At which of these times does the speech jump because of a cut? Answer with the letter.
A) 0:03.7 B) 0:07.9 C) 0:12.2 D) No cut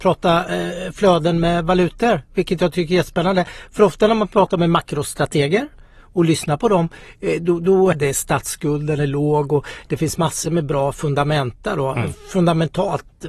B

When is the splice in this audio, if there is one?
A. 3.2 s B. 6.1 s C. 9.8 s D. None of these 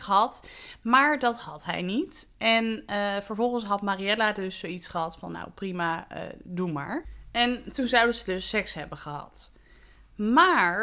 D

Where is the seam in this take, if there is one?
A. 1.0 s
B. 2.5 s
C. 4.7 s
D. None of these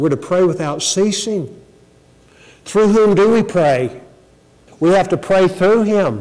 C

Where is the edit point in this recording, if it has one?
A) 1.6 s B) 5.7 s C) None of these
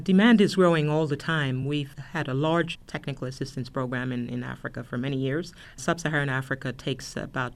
C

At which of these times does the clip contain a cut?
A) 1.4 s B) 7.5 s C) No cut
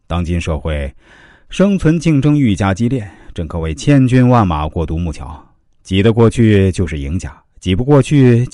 C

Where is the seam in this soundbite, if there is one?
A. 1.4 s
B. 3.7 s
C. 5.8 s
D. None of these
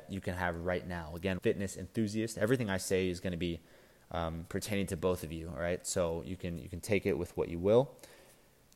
A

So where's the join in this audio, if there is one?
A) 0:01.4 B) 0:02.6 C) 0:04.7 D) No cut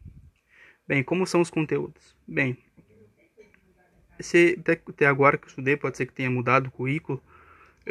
C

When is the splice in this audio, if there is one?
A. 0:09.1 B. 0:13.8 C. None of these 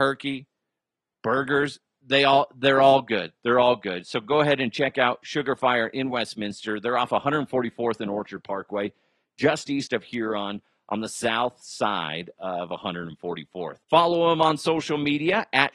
B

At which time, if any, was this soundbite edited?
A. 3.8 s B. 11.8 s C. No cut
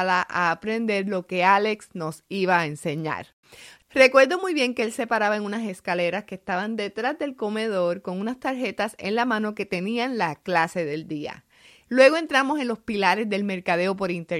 B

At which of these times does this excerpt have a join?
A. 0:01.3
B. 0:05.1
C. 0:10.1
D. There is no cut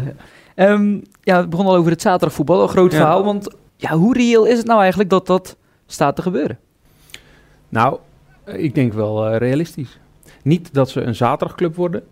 D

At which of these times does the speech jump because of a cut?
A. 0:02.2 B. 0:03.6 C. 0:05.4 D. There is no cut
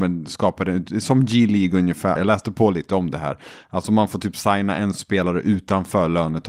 A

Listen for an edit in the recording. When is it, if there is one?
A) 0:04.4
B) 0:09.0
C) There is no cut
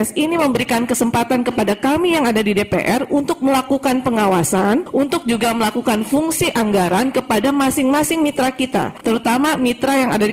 C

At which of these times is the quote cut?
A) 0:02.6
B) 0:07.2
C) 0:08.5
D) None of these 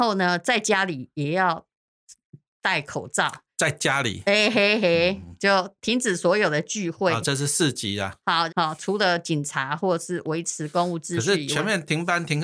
C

